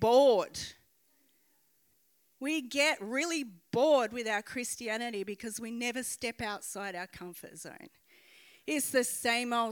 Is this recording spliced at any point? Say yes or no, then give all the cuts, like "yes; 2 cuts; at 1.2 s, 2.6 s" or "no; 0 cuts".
no; 0 cuts